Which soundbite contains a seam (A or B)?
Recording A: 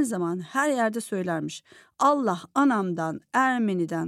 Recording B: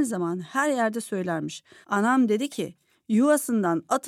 B